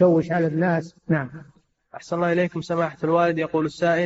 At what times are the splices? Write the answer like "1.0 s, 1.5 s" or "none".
1.0 s